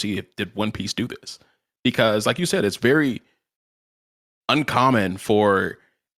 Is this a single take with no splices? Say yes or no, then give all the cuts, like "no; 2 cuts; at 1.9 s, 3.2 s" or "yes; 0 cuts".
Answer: yes; 0 cuts